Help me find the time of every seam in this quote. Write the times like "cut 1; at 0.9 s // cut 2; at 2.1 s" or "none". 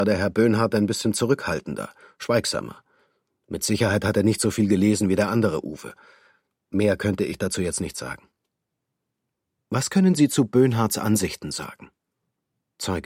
none